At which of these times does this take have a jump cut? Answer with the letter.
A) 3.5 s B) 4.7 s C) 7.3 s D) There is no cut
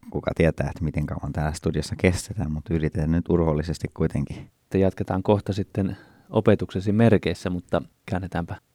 B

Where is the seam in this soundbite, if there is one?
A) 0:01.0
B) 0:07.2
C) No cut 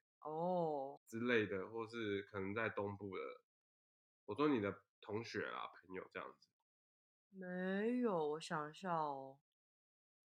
A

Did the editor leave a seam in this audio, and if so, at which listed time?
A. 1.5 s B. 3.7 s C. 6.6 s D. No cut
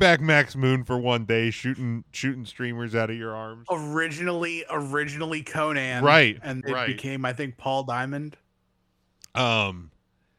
C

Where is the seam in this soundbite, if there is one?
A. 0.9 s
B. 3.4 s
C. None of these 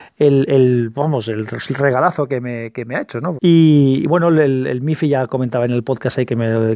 B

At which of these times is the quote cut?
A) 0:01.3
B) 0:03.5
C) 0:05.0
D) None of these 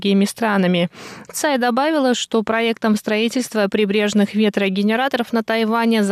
A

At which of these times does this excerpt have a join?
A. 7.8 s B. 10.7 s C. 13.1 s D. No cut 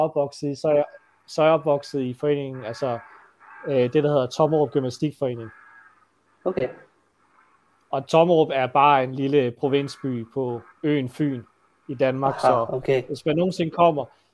B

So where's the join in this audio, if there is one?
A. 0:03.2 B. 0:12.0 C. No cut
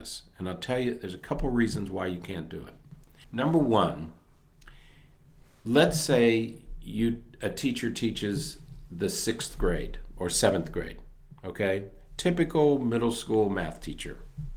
A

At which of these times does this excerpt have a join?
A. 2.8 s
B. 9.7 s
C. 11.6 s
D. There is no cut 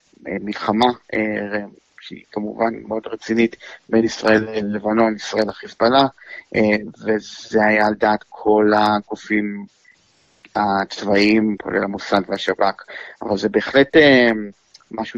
A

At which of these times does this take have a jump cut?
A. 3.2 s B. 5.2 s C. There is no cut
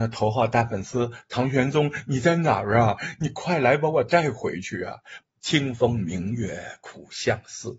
B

